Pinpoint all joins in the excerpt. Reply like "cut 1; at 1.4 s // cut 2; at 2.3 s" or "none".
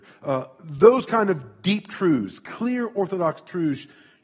none

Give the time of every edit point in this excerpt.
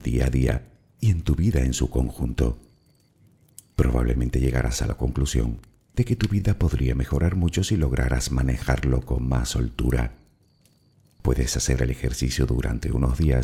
none

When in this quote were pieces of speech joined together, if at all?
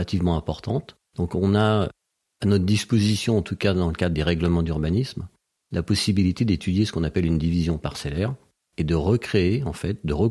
cut 1; at 1.1 s

